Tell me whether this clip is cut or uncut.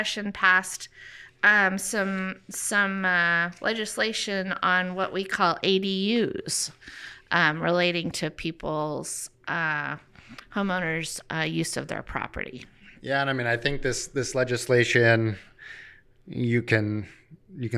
uncut